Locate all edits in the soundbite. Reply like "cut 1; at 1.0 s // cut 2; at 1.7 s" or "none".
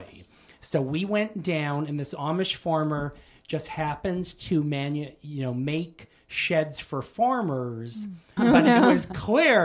cut 1; at 8.4 s